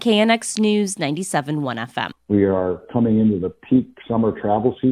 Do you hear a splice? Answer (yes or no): yes